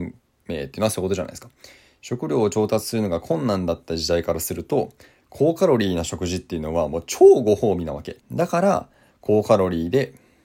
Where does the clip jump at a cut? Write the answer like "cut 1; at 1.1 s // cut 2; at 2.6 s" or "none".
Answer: cut 1; at 8.2 s